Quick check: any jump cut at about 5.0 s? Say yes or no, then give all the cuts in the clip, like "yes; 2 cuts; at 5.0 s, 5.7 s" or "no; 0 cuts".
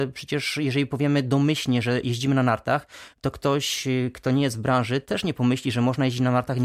no; 0 cuts